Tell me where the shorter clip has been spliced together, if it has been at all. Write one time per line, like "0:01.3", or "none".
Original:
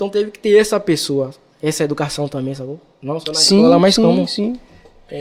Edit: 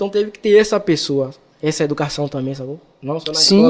none